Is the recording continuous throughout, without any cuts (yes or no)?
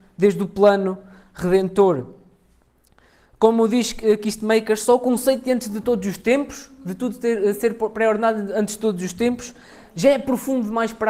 yes